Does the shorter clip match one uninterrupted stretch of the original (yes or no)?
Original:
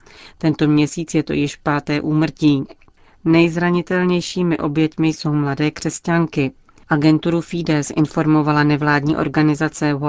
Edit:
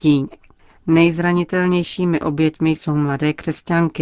yes